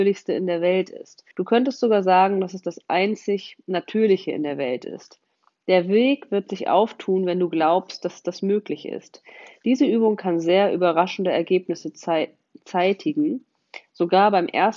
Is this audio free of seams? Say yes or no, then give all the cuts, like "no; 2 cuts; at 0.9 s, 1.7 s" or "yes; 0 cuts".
no; 1 cut; at 1.3 s